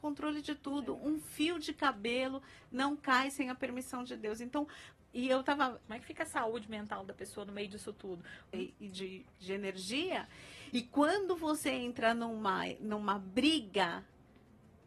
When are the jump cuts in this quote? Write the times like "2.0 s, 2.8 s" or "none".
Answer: 5.8 s, 8.5 s